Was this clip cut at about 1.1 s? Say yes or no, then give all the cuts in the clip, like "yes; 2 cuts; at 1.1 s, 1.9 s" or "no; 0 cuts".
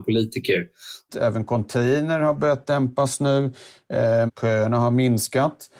yes; 2 cuts; at 1.1 s, 4.3 s